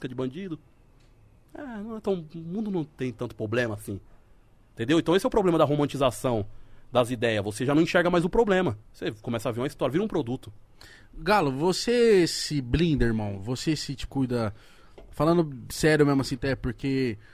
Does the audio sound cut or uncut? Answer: cut